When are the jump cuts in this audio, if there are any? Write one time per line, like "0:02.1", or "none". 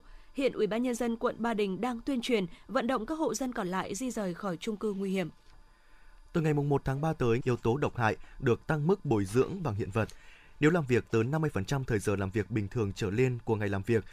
0:07.4